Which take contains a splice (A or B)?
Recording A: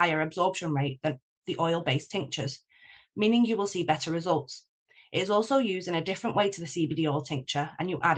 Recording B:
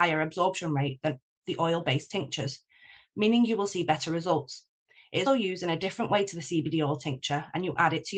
B